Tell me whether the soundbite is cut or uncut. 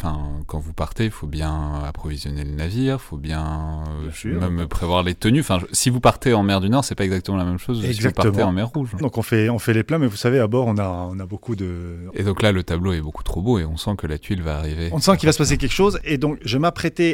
cut